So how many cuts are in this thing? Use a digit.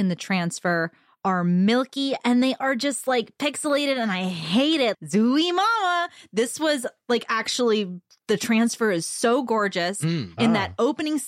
3